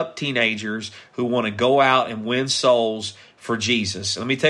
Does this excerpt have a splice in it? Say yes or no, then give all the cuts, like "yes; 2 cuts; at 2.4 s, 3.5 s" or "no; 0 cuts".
no; 0 cuts